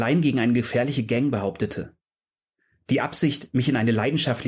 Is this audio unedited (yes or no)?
yes